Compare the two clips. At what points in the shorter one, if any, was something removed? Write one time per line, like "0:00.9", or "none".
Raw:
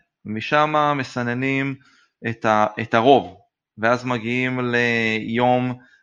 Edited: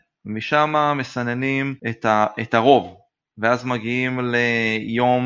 0:01.8

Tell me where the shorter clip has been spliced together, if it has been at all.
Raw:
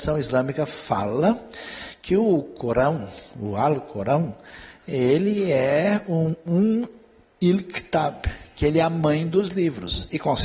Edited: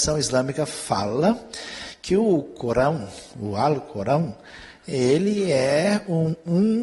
none

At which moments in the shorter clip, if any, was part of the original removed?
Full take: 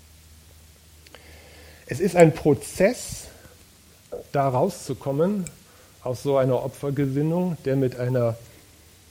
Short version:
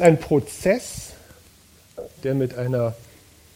0:02.2

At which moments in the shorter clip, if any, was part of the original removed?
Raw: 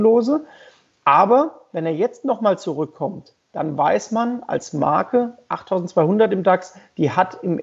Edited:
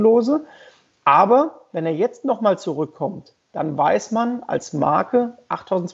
none

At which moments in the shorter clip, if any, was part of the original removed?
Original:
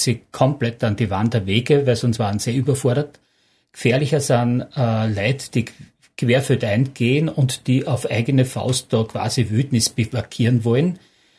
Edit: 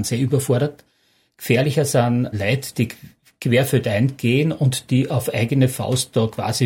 0:02.3

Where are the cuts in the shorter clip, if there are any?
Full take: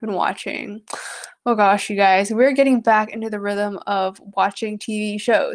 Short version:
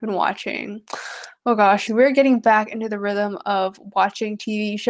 0:01.9

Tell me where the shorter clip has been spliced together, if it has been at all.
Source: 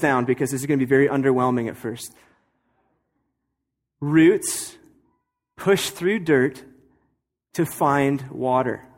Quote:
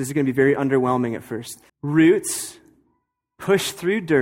0:01.7

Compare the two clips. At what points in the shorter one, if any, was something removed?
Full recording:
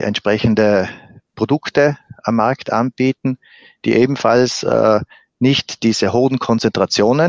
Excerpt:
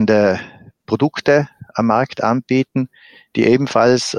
none

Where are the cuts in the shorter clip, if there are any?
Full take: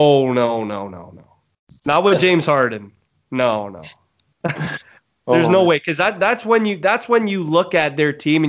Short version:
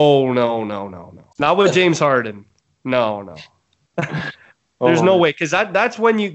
0:01.3

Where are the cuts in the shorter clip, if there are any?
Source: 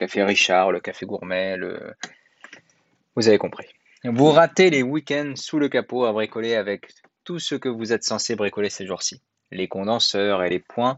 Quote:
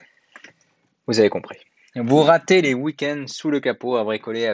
none

